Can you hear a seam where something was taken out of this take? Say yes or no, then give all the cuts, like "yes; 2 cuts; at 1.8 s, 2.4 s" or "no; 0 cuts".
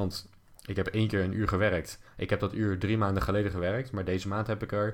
yes; 1 cut; at 2.1 s